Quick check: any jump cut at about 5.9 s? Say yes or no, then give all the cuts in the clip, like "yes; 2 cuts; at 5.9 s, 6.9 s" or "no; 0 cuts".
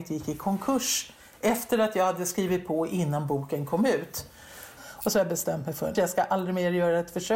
yes; 2 cuts; at 4.8 s, 5.9 s